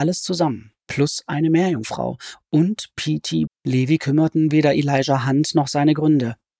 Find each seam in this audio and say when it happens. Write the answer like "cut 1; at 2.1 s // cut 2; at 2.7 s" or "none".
cut 1; at 3.5 s